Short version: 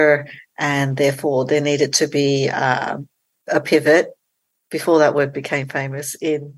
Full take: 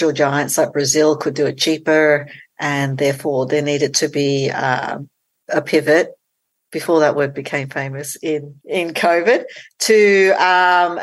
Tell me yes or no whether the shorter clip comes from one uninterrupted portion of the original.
yes